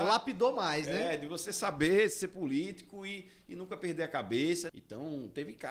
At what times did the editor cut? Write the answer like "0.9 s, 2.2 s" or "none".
4.7 s